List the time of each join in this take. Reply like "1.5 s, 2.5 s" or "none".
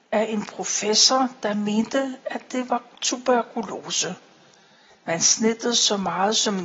none